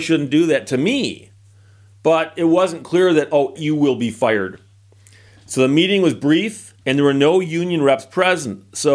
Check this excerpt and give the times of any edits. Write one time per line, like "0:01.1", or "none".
0:03.6
0:06.8